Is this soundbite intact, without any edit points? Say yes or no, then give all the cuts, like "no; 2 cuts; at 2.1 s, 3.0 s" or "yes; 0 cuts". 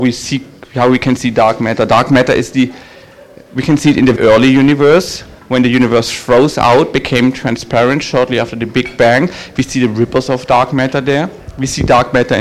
no; 1 cut; at 4.2 s